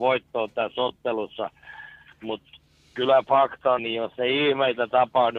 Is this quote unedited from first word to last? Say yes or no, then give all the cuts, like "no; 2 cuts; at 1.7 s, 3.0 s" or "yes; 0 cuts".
no; 2 cuts; at 2.1 s, 3.8 s